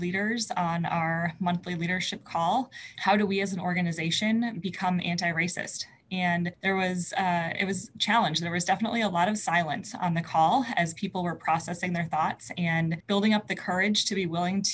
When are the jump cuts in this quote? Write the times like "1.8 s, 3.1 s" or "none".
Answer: 2.9 s